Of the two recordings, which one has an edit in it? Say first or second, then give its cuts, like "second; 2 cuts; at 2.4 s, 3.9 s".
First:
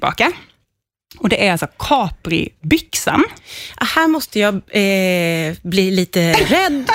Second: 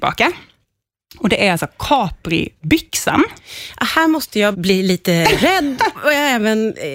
second; 2 cuts; at 4.5 s, 5.9 s